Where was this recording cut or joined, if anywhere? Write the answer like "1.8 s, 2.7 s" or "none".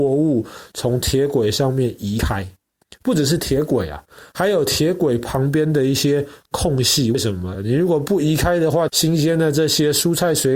7.5 s, 8.9 s